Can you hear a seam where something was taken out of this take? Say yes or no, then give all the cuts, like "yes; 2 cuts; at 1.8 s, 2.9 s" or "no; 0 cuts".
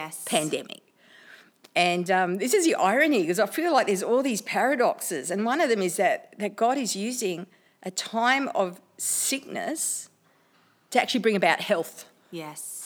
no; 0 cuts